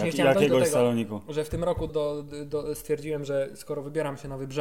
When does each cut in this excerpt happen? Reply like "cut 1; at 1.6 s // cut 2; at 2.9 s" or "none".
cut 1; at 1.9 s